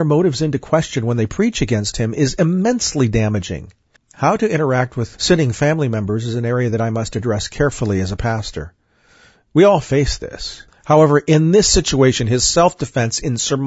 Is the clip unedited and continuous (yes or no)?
no